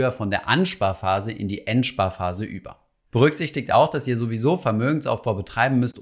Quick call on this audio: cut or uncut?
uncut